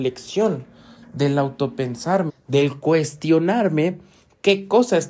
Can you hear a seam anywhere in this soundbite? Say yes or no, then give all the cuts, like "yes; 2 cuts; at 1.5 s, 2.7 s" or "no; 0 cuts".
yes; 1 cut; at 2.3 s